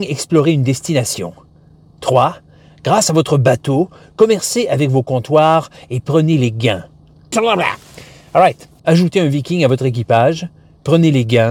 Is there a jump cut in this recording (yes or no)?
yes